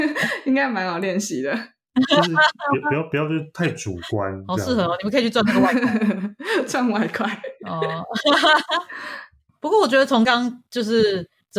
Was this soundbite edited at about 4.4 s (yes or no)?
no